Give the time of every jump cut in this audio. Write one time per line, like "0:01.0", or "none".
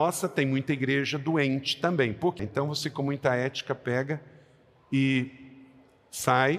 0:02.4